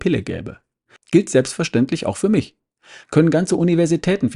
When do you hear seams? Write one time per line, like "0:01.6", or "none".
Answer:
0:01.0
0:03.0